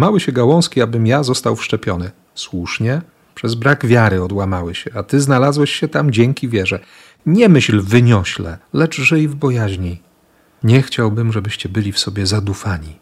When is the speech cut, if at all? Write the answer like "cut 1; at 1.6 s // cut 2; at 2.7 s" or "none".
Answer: none